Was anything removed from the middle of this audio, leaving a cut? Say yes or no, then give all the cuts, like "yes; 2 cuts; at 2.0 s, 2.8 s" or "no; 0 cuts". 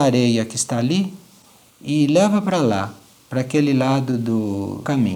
no; 0 cuts